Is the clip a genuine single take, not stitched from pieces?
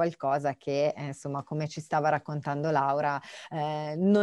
yes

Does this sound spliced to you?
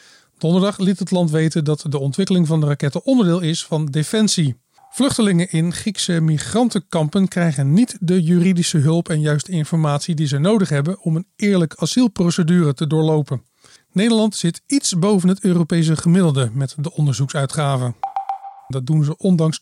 yes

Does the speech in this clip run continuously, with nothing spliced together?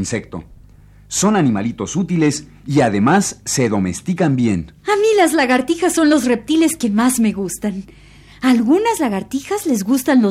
yes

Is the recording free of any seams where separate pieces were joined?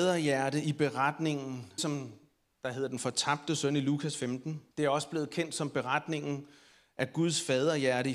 no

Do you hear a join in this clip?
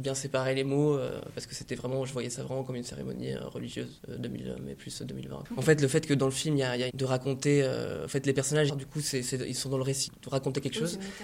yes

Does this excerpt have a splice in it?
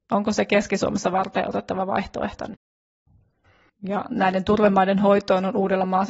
yes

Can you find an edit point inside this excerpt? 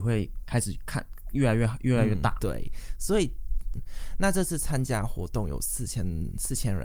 yes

